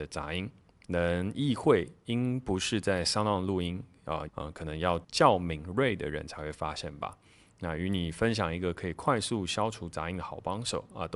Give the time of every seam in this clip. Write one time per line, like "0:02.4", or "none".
0:04.3